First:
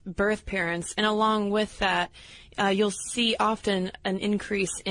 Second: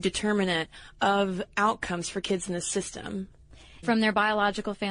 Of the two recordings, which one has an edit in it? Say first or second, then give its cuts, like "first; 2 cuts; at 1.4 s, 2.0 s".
second; 1 cut; at 3.8 s